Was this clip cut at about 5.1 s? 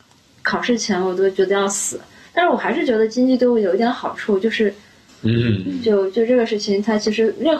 yes; 1 cut; at 5.1 s

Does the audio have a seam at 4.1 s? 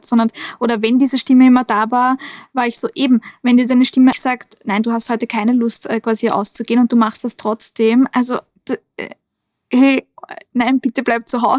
yes; 2 cuts; at 4.1 s, 10.5 s

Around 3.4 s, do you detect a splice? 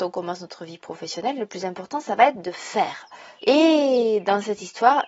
yes; 1 cut; at 3.4 s

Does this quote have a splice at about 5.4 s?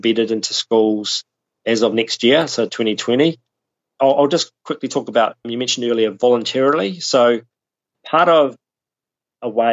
no; 0 cuts

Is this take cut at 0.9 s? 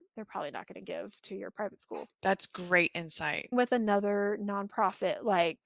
no; 2 cuts; at 2.1 s, 3.5 s

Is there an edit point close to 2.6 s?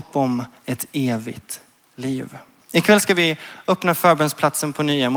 yes; 1 cut; at 2.6 s

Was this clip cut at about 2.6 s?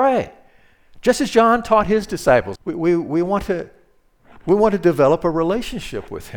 yes; 1 cut; at 2.6 s

